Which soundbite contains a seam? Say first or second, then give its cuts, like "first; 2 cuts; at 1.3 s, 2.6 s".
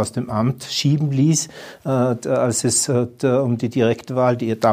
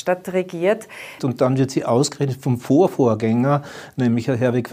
second; 1 cut; at 1.2 s